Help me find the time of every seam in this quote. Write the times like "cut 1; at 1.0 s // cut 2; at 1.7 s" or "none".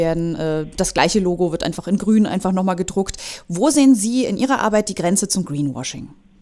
none